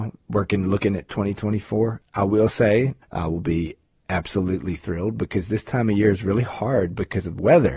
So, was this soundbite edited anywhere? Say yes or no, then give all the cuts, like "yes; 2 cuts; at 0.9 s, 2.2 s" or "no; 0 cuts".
yes; 1 cut; at 3.0 s